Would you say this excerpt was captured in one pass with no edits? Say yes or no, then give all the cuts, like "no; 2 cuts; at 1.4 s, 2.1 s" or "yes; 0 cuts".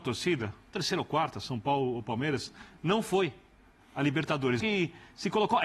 no; 1 cut; at 4.6 s